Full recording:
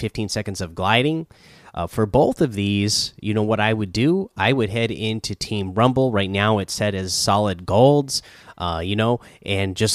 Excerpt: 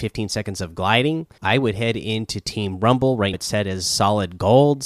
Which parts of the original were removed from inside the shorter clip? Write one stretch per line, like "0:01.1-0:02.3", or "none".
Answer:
0:01.4-0:04.3
0:06.3-0:06.6